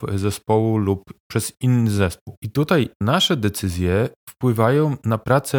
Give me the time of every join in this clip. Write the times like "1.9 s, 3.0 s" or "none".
none